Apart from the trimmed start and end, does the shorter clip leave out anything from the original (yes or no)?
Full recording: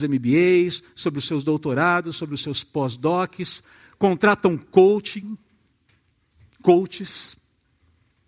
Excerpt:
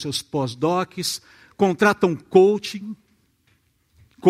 no